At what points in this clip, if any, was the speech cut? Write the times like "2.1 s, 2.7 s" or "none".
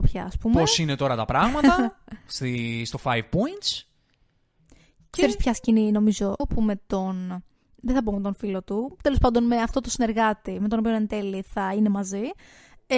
6.4 s